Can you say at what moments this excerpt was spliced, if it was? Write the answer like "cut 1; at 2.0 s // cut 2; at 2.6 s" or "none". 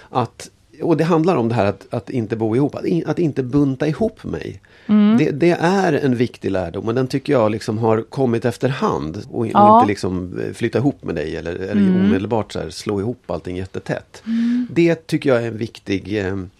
cut 1; at 9.2 s